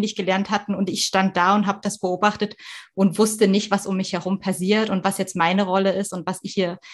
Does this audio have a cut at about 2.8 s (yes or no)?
no